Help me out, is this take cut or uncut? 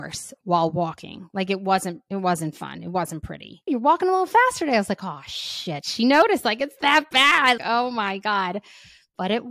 cut